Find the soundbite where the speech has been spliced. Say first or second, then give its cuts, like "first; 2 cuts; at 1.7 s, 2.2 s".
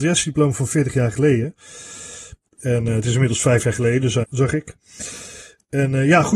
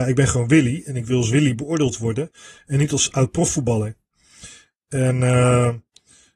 first; 2 cuts; at 2.5 s, 4.2 s